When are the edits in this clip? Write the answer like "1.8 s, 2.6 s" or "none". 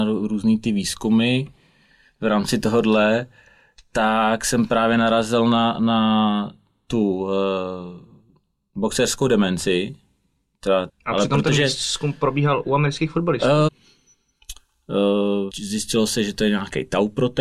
10.9 s, 13.7 s, 15.5 s